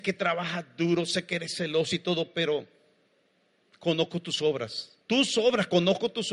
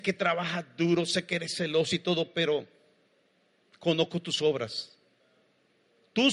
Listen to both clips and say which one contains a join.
first; 1 cut; at 5.0 s

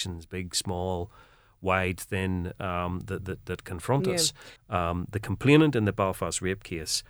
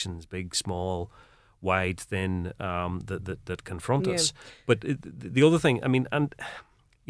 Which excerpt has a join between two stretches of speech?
first; 1 cut; at 4.6 s

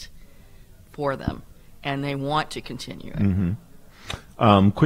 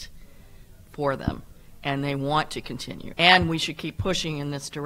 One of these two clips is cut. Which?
second; 1 cut; at 3.1 s

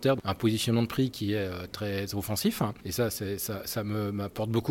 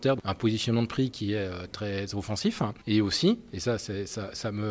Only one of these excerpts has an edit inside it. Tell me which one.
first; 1 cut; at 2.8 s

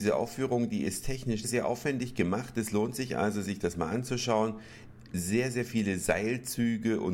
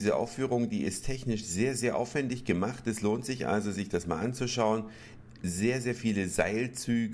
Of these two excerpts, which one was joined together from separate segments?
first; 1 cut; at 1.4 s

